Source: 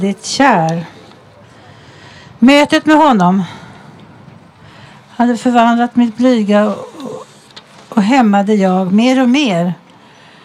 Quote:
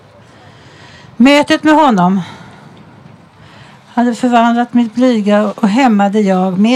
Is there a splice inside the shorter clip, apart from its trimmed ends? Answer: yes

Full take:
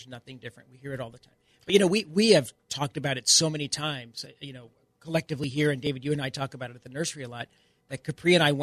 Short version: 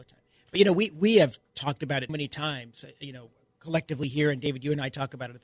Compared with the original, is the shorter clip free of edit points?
no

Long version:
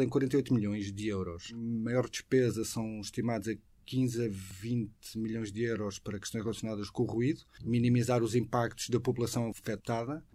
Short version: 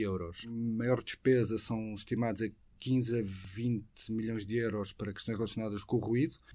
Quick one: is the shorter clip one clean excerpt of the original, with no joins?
yes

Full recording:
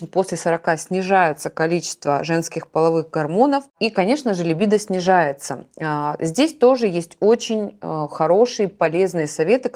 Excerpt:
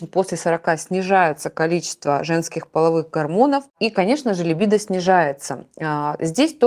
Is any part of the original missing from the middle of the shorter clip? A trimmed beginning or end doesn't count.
no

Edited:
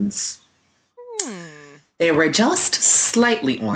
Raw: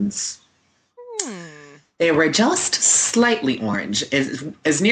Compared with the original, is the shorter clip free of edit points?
yes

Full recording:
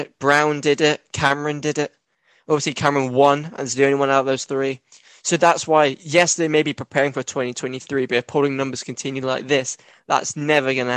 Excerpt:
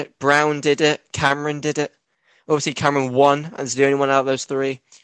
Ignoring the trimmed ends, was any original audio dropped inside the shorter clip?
no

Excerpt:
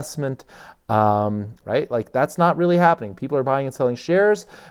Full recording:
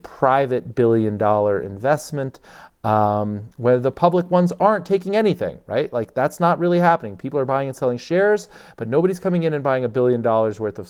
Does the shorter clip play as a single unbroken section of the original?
no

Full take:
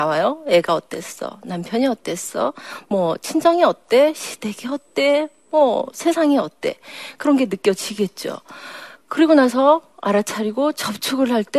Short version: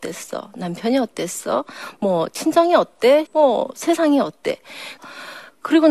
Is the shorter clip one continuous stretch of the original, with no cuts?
no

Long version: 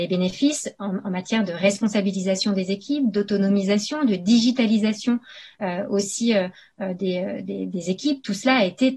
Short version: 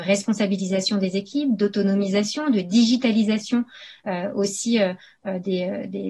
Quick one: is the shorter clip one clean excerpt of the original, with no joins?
yes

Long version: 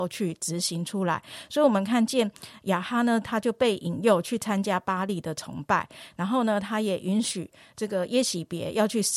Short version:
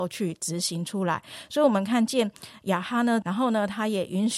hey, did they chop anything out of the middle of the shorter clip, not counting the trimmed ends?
yes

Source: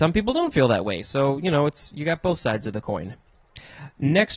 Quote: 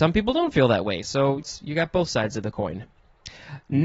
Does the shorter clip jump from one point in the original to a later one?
yes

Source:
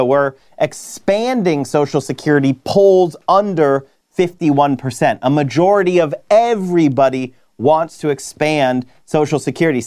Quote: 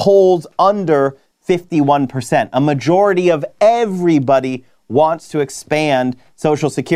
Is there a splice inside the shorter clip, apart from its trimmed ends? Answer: no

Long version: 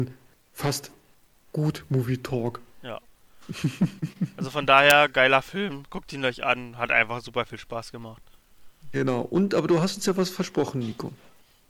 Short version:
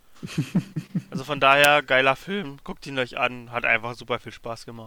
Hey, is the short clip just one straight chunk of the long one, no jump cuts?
yes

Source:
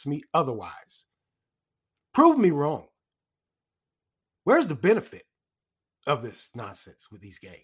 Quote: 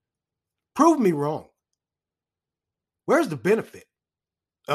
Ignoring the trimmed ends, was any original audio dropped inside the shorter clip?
no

